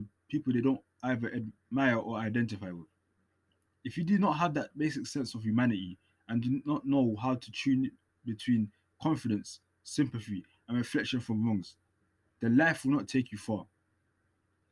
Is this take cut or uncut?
uncut